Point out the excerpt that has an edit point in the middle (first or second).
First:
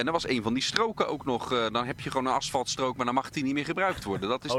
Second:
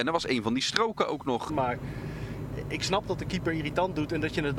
second